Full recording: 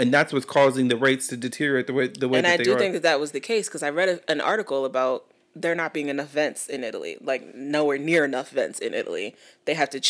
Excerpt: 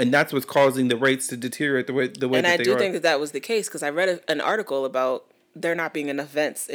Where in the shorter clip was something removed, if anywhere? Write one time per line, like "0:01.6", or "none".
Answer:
none